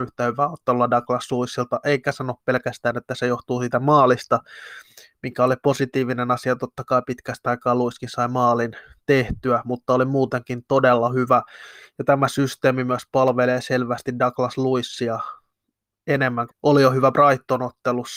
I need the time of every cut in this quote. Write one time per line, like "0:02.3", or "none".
0:16.5

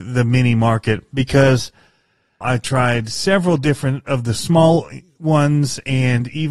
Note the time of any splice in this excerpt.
0:02.4

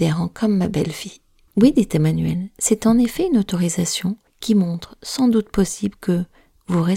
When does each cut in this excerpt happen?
0:01.5

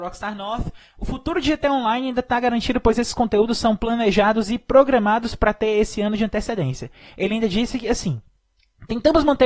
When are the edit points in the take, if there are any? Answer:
none

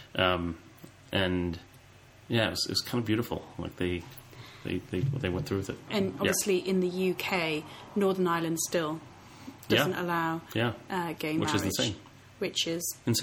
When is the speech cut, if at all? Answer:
0:05.9

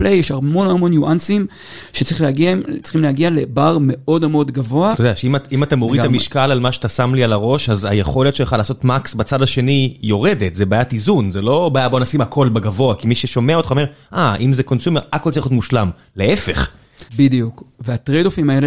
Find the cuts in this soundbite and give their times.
0:04.9
0:17.1

